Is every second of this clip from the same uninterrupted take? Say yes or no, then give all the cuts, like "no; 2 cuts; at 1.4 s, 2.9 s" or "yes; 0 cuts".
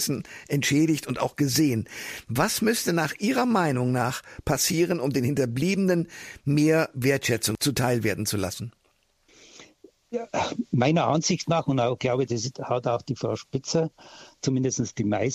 no; 2 cuts; at 12.5 s, 14.4 s